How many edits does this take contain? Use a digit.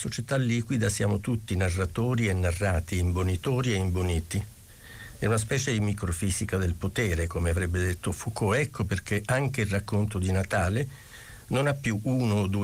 0